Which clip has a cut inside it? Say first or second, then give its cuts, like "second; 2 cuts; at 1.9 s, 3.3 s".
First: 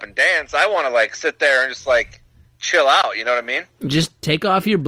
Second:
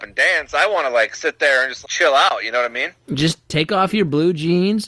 second; 1 cut; at 1.8 s